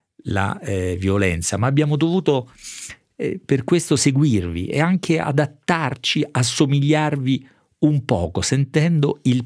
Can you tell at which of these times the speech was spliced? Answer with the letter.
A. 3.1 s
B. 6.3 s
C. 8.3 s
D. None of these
D